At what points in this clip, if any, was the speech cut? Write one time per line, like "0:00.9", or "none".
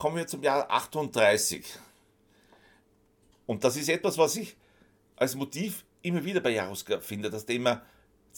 0:03.3
0:05.9